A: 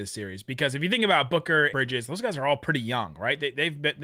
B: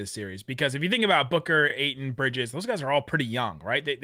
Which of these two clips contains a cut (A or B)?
A